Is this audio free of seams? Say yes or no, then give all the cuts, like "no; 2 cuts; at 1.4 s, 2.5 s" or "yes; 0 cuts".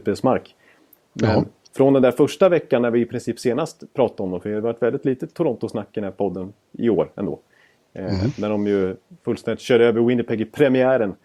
yes; 0 cuts